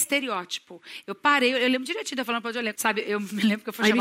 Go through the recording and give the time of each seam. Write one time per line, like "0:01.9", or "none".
0:02.8